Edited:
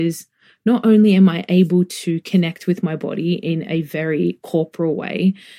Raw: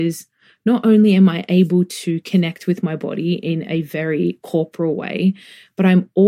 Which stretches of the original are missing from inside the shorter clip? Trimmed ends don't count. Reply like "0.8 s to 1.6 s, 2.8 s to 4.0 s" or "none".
none